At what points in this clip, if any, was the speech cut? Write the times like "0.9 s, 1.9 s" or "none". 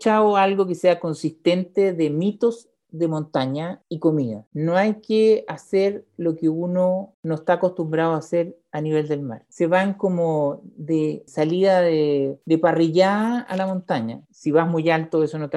9.5 s, 14.2 s